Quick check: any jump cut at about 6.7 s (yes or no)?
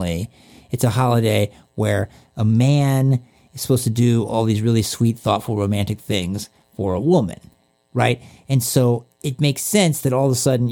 no